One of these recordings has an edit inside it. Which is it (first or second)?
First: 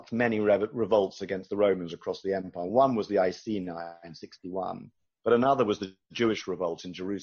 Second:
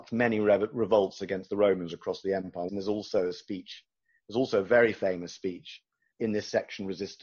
second